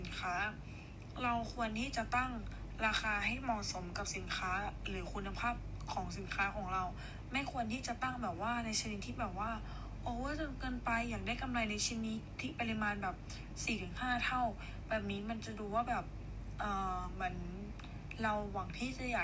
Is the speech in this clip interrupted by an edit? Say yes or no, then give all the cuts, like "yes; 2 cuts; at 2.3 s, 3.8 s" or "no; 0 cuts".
no; 0 cuts